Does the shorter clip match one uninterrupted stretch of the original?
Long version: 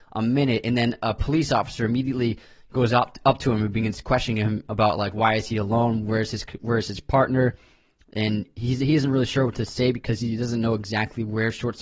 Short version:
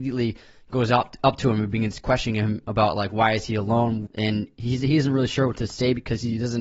no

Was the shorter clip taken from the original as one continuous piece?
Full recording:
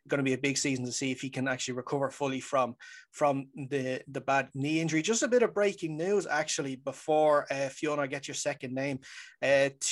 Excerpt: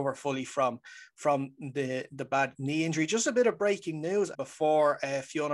no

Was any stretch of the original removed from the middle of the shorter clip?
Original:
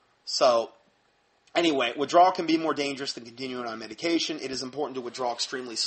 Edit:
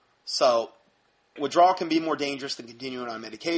yes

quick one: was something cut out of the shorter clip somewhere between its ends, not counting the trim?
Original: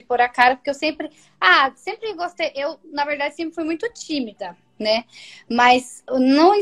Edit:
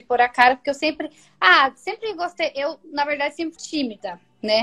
yes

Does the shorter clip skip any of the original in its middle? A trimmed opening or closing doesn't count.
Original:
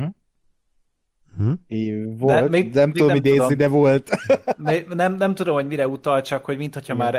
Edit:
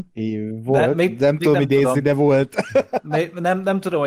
no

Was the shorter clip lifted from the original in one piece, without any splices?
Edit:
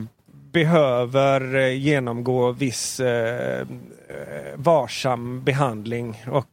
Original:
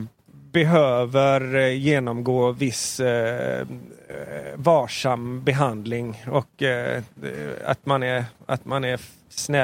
yes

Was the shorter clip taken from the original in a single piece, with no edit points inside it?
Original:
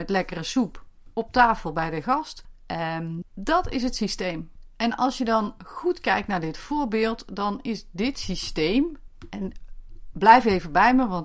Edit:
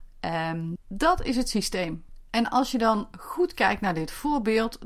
yes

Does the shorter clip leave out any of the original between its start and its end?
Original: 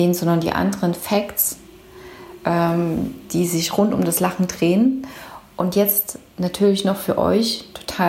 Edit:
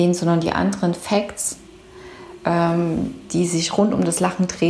no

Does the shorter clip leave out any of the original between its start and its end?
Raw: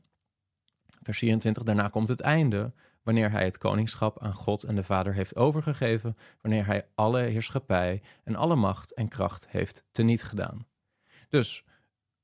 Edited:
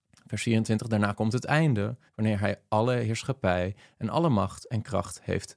yes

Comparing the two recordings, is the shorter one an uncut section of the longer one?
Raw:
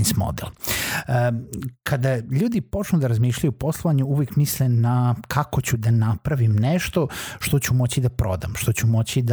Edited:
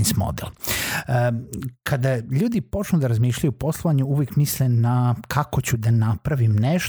yes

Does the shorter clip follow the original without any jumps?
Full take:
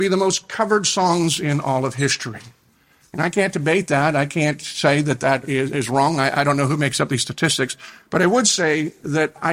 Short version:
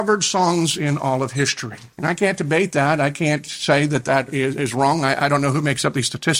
no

